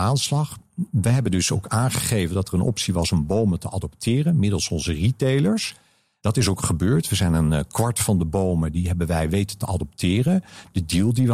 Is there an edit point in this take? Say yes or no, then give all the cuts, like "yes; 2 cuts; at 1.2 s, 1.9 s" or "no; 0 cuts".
no; 0 cuts